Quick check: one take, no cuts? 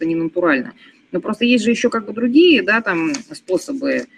no; 1 cut; at 1.2 s

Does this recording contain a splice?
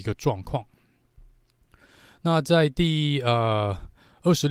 no; 0 cuts

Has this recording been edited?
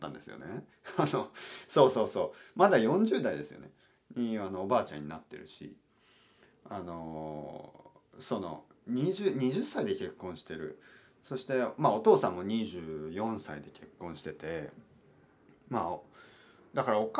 no; 0 cuts

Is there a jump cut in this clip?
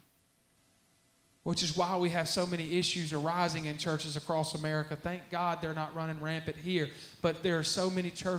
no; 0 cuts

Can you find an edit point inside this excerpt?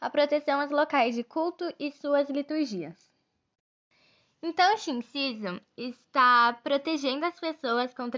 no; 0 cuts

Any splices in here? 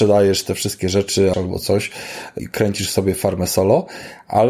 yes; 2 cuts; at 1.3 s, 2.4 s

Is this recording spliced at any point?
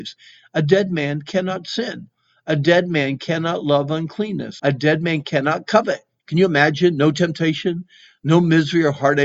yes; 2 cuts; at 4.6 s, 6.2 s

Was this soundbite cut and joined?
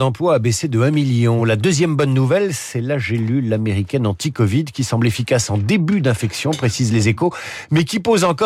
no; 0 cuts

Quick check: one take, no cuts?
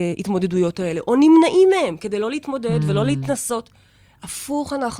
yes; 0 cuts

